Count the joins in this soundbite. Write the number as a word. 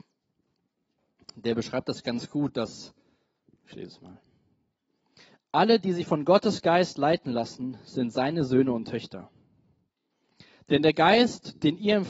zero